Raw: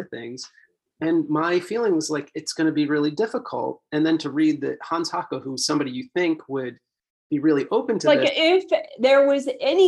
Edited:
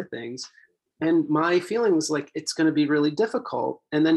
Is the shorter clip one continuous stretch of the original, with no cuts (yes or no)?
yes